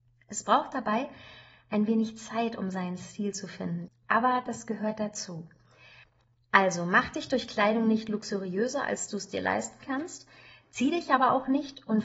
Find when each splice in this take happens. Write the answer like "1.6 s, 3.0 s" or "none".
3.9 s